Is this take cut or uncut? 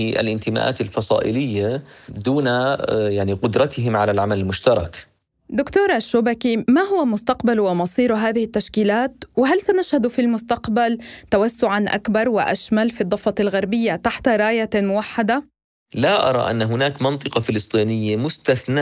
uncut